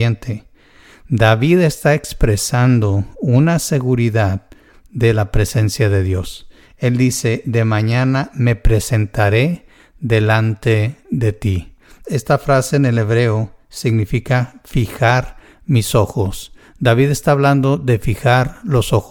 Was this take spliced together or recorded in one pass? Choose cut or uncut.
cut